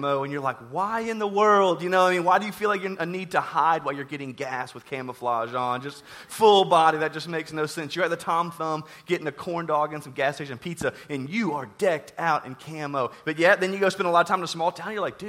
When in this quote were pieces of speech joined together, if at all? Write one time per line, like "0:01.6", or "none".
none